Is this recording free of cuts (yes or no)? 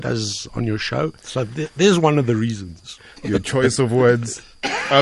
no